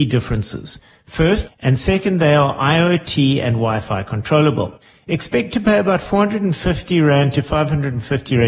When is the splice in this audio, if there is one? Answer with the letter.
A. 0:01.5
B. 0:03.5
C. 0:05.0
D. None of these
A